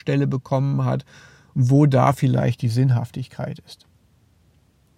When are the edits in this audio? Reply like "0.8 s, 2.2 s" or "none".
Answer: 1.5 s

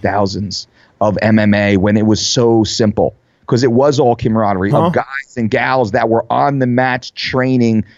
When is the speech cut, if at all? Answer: 4.7 s

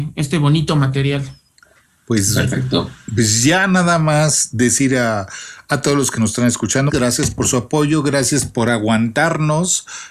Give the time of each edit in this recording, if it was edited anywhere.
6.9 s

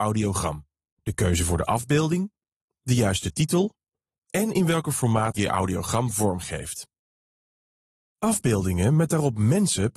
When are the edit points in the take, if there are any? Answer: 5.4 s

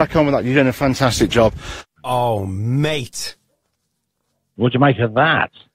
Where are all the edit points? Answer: 1.9 s

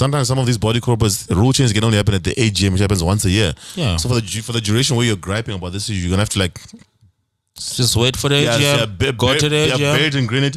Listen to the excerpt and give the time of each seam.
none

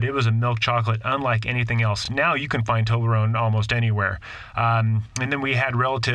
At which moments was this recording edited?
none

